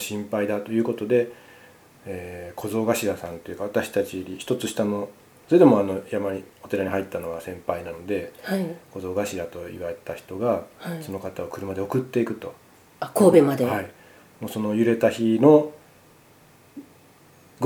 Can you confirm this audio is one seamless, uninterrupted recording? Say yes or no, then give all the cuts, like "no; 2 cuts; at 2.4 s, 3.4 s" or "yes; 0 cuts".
yes; 0 cuts